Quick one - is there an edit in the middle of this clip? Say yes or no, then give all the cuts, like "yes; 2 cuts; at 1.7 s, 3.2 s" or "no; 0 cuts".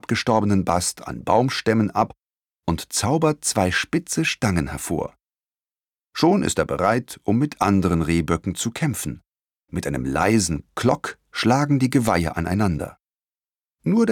no; 0 cuts